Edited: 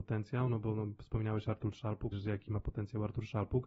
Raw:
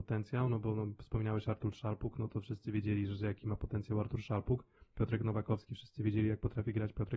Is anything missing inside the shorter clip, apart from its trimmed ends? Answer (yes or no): yes